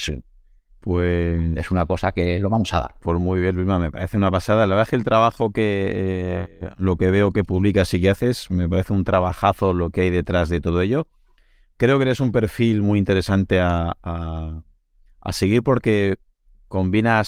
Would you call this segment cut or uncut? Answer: uncut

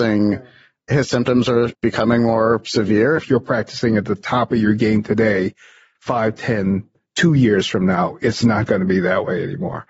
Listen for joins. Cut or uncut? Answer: cut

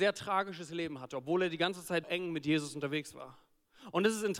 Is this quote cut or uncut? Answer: cut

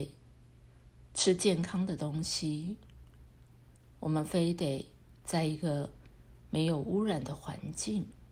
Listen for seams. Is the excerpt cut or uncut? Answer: uncut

